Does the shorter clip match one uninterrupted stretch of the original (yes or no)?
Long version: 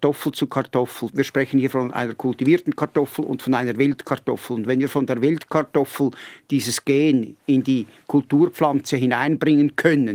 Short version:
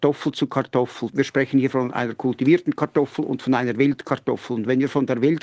yes